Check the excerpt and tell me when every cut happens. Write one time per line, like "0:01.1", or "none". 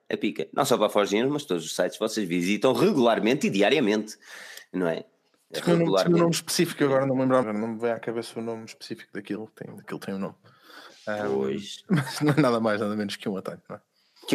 0:07.4